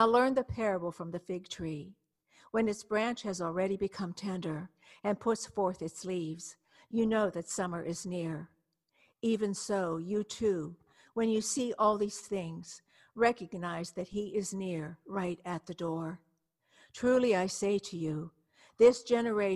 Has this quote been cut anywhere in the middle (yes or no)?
no